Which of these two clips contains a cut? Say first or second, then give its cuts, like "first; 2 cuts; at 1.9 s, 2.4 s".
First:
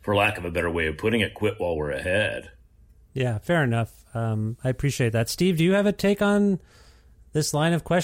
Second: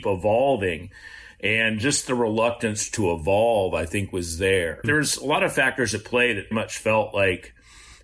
second; 2 cuts; at 4.8 s, 6.5 s